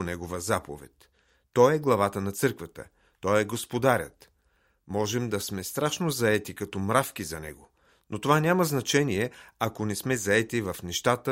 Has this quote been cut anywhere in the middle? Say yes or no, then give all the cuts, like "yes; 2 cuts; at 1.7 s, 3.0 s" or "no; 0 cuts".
no; 0 cuts